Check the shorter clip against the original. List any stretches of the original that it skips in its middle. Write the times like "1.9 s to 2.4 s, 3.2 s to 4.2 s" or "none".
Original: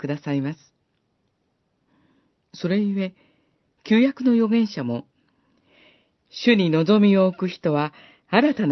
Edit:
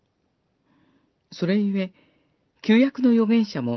none